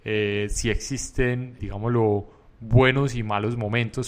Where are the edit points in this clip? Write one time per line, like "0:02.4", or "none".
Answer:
0:01.6